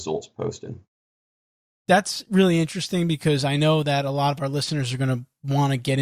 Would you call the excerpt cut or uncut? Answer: uncut